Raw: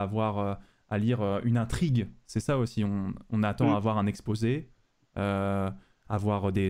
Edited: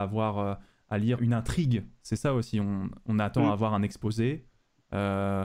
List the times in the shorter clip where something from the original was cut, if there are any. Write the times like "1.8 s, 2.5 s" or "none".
1.2 s

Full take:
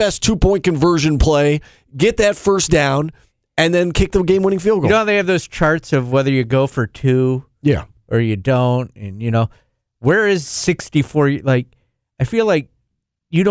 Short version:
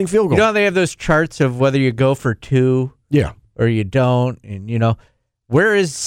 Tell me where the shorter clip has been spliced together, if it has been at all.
none

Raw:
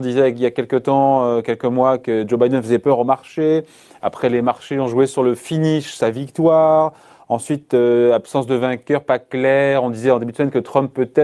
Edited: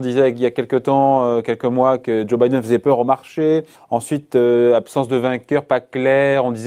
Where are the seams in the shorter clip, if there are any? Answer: 3.7 s

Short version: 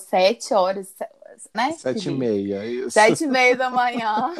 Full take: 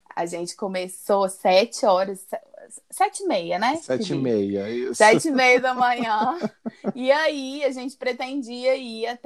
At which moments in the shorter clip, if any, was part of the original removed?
1.5 s

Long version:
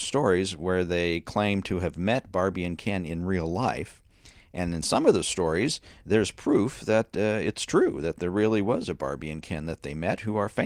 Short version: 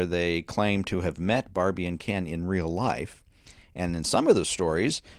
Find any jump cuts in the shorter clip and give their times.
none

